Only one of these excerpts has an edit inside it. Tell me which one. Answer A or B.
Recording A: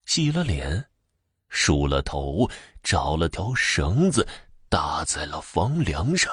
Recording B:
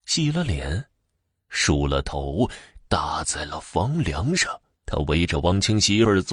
B